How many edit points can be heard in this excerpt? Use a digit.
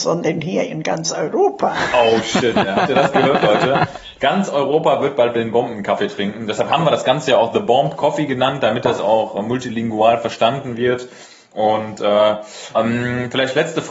1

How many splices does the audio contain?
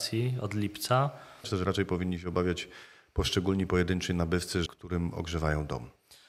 2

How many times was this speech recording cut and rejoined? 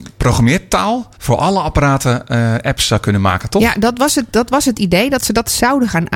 1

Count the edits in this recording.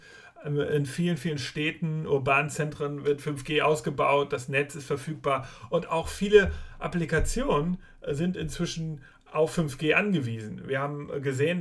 0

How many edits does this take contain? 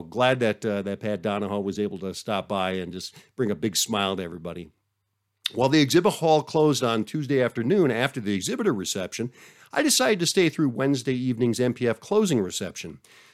0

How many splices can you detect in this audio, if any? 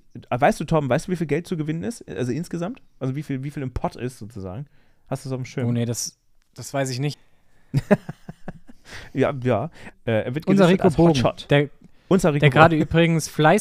2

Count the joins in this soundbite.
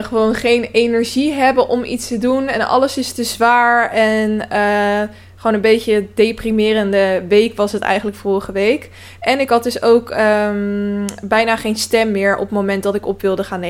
0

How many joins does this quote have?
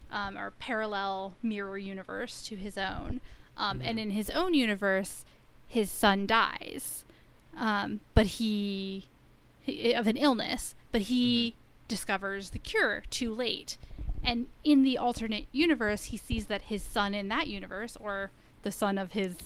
0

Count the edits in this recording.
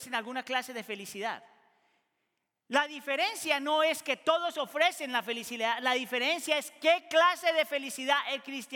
0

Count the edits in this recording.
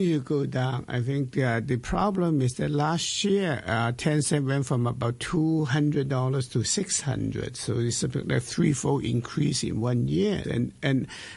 1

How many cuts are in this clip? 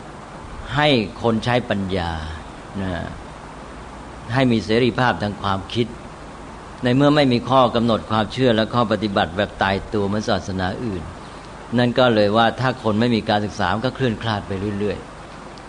0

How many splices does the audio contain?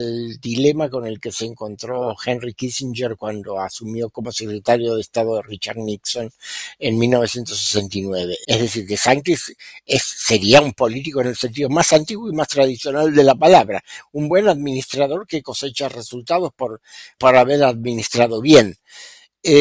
2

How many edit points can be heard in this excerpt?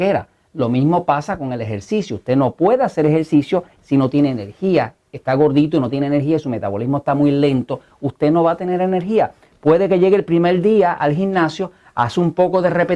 0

